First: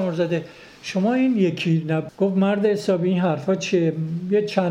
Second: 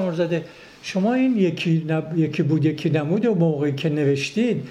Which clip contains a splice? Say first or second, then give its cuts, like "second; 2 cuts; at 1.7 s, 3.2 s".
first; 1 cut; at 2.1 s